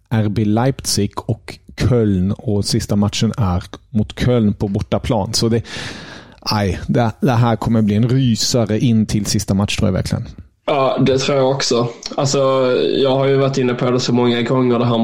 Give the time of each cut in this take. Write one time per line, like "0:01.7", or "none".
none

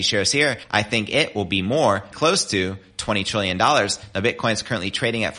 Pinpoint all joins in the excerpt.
0:02.1

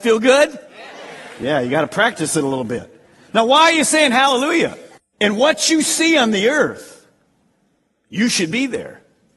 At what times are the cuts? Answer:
0:05.0

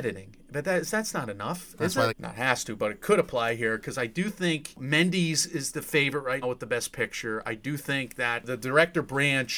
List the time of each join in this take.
0:02.1
0:06.4

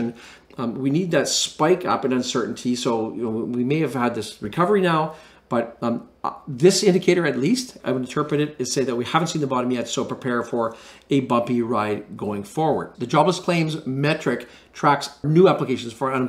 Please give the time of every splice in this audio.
0:07.8
0:12.9

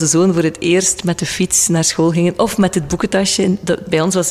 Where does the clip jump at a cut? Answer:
none

